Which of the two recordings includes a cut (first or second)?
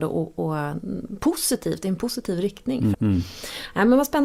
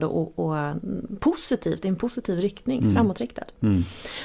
first